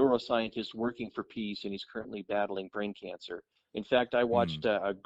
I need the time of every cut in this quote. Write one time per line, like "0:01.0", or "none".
0:03.7